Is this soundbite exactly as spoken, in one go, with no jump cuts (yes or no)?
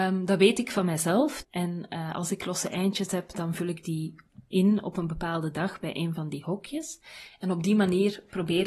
no